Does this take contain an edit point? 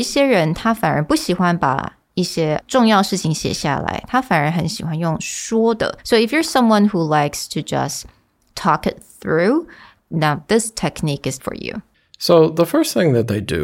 yes; 2 cuts; at 10.0 s, 11.4 s

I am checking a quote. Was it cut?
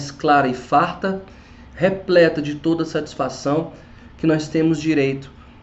no; 0 cuts

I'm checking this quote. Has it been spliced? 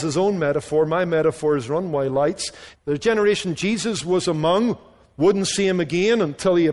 yes; 1 cut; at 2.7 s

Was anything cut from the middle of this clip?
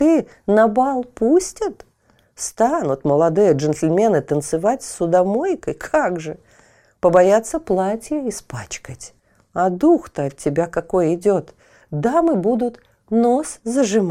no; 0 cuts

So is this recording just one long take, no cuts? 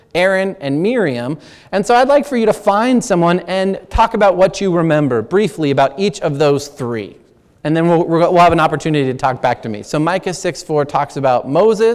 no; 1 cut; at 9.8 s

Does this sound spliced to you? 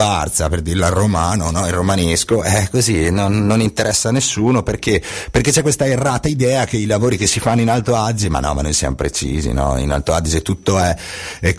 no; 0 cuts

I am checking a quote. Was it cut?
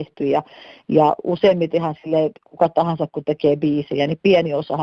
no; 0 cuts

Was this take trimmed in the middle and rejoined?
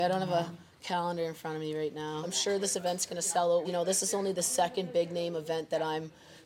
yes; 2 cuts; at 2.2 s, 3.6 s

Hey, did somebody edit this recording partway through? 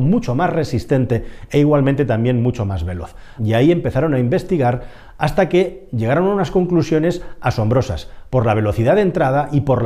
yes; 1 cut; at 3.4 s

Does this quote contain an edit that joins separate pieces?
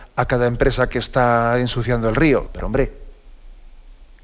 yes; 2 cuts; at 0.9 s, 2.5 s

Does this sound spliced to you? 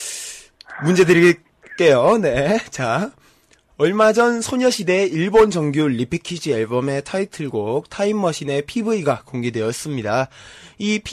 no; 0 cuts

